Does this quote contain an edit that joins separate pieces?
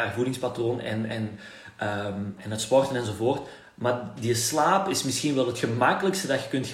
yes; 1 cut; at 2.4 s

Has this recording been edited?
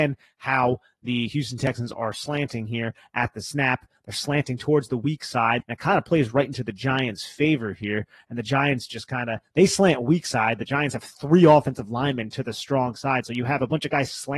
yes; 1 cut; at 5.6 s

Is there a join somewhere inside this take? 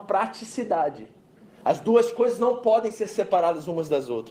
no; 0 cuts

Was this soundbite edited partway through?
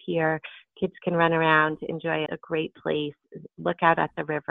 yes; 1 cut; at 2.3 s

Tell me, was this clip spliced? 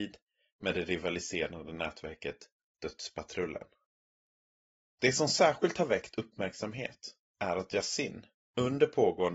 yes; 1 cut; at 4.9 s

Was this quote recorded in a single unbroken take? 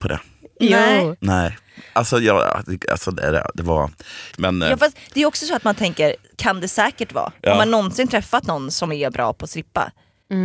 no; 1 cut; at 4.3 s

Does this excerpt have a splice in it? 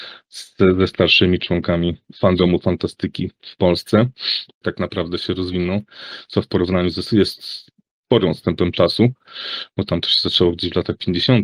yes; 2 cuts; at 4.6 s, 7.0 s

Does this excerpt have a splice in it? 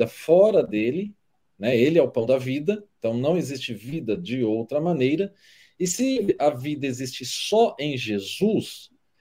no; 0 cuts

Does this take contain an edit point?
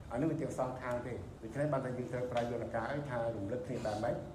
no; 0 cuts

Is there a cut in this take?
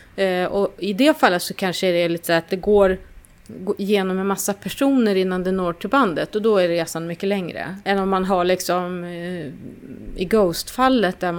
no; 0 cuts

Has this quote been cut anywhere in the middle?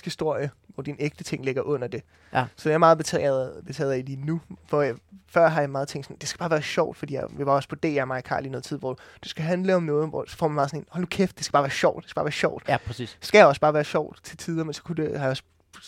no; 0 cuts

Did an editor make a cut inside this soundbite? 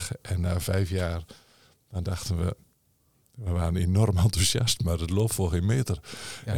no; 0 cuts

